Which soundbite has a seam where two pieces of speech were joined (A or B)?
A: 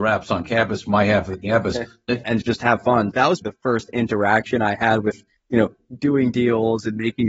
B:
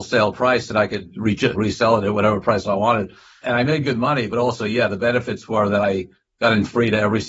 A